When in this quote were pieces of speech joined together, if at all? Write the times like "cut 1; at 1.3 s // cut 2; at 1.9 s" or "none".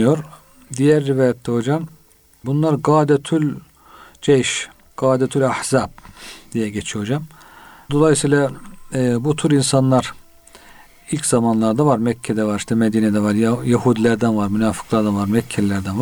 cut 1; at 7.9 s